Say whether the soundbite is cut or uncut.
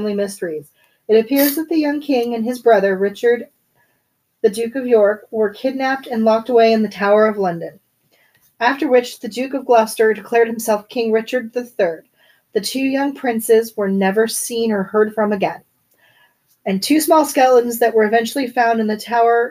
uncut